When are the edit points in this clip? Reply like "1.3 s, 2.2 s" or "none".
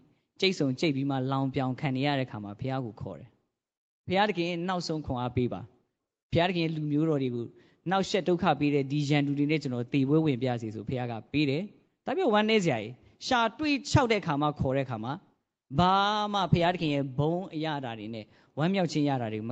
none